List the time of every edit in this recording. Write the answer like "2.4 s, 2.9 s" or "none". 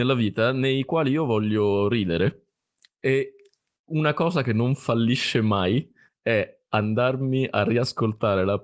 none